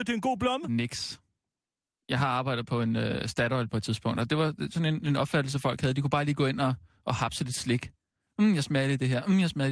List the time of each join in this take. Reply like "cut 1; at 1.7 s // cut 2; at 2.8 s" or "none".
none